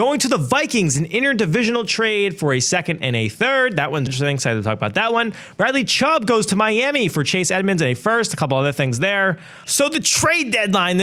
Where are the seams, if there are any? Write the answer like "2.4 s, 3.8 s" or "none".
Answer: 4.1 s, 9.6 s